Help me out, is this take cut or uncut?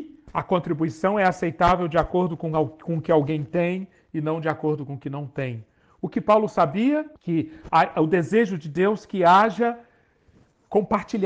cut